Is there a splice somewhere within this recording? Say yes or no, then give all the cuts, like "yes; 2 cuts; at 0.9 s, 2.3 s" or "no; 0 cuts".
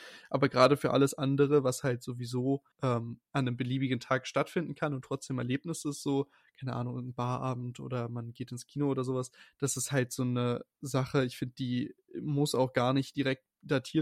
yes; 1 cut; at 2.7 s